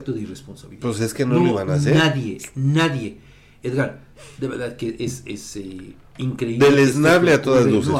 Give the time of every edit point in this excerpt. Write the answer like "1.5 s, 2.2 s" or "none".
none